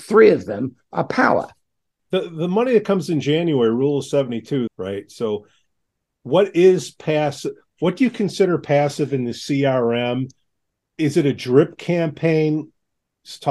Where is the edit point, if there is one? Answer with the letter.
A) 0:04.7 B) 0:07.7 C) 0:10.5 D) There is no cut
A